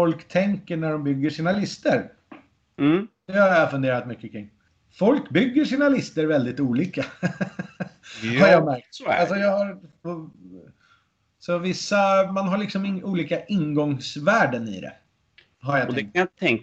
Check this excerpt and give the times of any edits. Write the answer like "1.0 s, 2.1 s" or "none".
10.0 s, 12.3 s